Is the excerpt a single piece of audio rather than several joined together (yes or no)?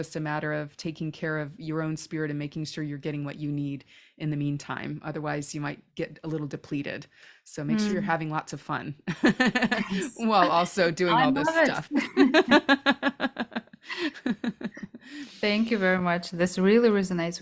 yes